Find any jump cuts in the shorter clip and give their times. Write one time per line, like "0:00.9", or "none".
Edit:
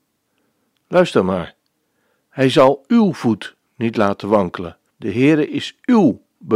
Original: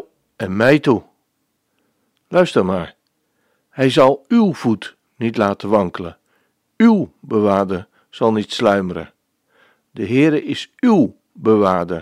0:04.9